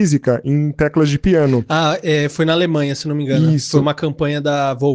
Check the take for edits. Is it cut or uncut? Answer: uncut